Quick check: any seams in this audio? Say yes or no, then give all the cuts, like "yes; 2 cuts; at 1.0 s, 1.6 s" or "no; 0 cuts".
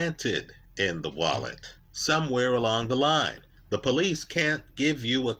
yes; 1 cut; at 1.8 s